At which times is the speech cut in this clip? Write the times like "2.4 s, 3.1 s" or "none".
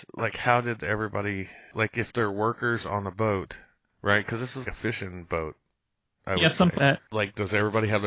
4.6 s, 6.8 s